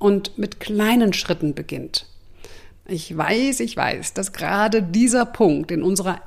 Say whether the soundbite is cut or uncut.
cut